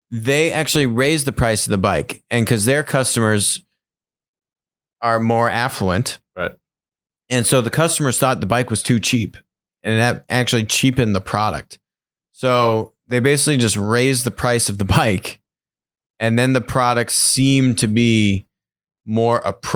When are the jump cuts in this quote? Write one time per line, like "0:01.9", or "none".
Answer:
none